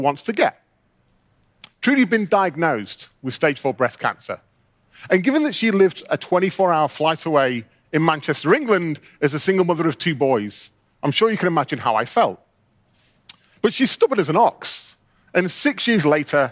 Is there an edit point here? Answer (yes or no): no